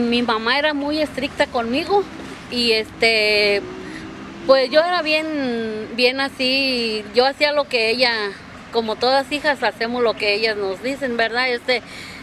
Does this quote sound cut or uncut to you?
uncut